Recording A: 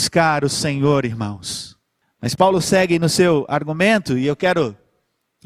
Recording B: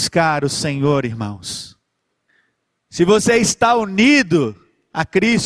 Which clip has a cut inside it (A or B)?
A